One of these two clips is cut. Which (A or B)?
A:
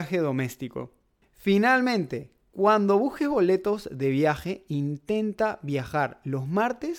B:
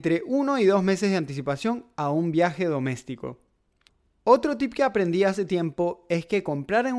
A